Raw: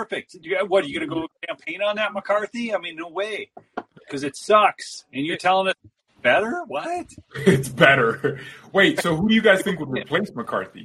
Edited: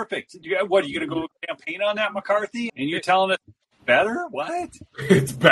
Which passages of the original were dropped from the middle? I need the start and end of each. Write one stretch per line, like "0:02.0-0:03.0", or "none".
0:02.7-0:05.1